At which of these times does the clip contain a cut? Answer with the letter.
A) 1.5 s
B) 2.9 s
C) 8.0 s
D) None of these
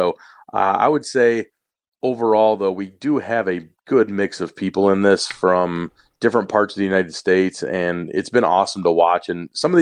D